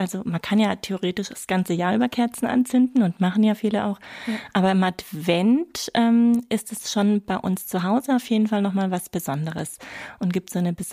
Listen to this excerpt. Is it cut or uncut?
uncut